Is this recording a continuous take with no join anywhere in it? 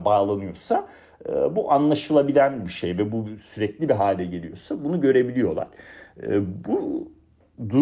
yes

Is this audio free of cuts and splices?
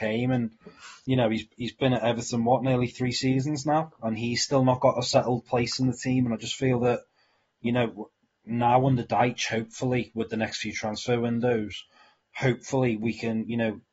yes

